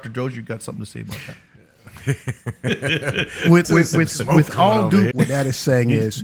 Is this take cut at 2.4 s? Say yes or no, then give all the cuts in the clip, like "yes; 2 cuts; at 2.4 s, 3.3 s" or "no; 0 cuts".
no; 2 cuts; at 3.6 s, 5.1 s